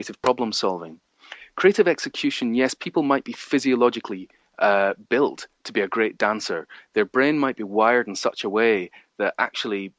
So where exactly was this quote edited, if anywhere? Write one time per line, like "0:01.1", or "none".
none